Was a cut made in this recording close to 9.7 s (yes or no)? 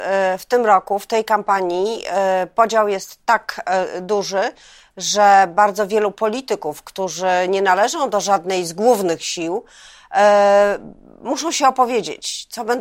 no